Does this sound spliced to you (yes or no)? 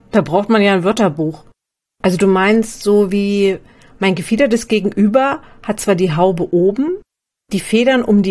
yes